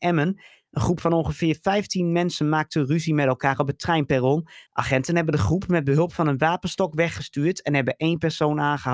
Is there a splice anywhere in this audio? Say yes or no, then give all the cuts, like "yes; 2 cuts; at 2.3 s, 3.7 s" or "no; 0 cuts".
yes; 1 cut; at 4.7 s